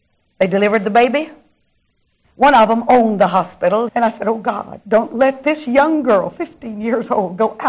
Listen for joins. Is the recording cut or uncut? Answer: cut